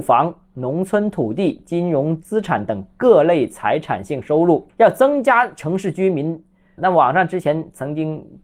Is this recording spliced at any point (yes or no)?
yes